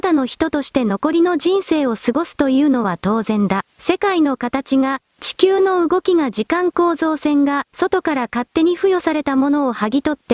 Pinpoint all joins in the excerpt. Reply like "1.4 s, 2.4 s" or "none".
3.7 s